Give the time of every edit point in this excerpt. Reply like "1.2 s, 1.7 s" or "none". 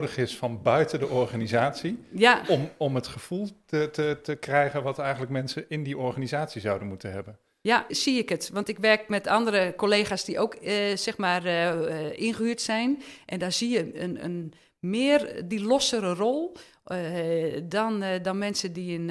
7.9 s